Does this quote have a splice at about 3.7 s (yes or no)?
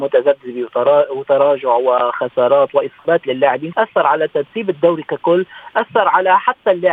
yes